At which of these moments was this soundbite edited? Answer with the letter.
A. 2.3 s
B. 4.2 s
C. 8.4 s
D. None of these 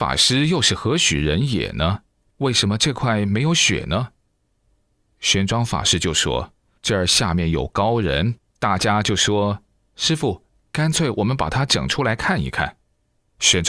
A